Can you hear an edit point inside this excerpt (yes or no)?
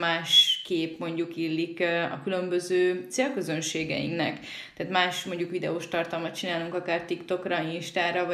no